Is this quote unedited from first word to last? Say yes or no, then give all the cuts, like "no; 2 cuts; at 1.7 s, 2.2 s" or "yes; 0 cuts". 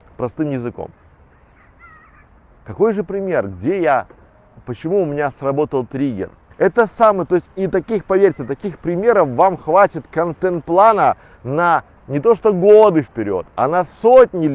no; 1 cut; at 6.5 s